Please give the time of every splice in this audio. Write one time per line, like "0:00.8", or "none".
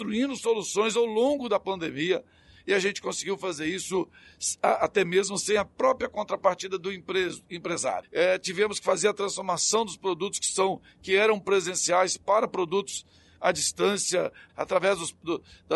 0:08.0
0:14.5